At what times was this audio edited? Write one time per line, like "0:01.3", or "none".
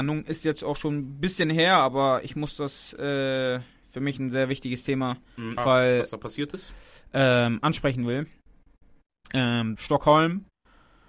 0:05.6
0:09.8

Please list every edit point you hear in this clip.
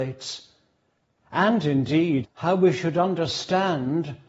0:02.2

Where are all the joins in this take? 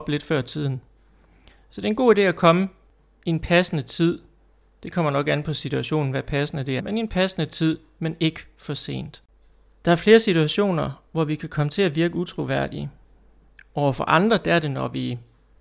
0:06.8

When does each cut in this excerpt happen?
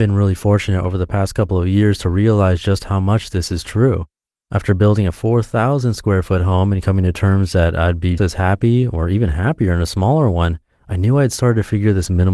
0:08.2

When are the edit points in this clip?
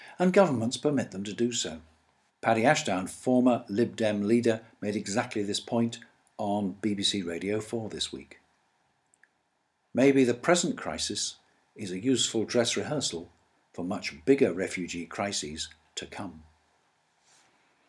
0:02.3

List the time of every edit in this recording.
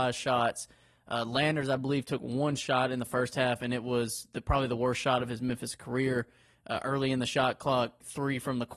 none

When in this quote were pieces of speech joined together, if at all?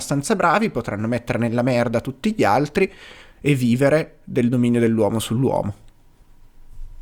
0:03.3

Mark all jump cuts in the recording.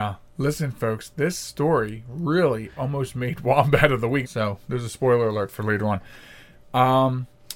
0:04.2

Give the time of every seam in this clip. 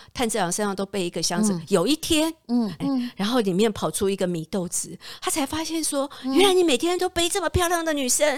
0:02.8

